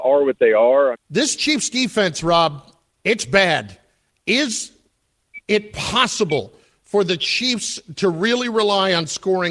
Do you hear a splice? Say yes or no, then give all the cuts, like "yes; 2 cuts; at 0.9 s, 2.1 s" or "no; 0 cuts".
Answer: yes; 1 cut; at 0.9 s